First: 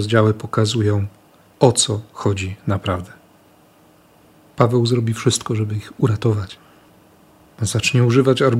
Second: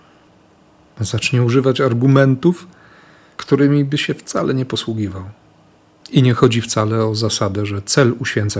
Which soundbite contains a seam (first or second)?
second